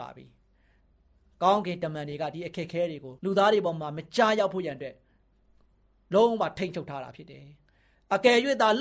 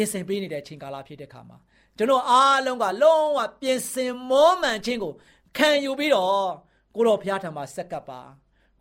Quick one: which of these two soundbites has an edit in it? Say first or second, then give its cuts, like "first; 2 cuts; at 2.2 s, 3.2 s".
first; 1 cut; at 3.2 s